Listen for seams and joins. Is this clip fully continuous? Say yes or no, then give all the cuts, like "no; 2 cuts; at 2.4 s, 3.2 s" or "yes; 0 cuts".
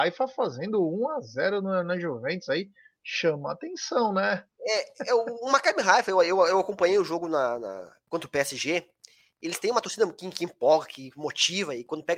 yes; 0 cuts